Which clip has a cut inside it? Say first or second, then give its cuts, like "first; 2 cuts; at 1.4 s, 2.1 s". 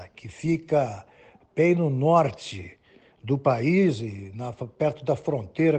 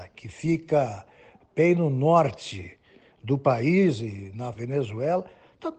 second; 1 cut; at 4.5 s